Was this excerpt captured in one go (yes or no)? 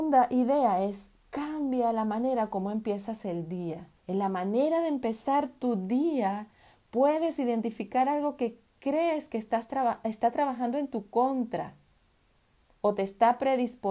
no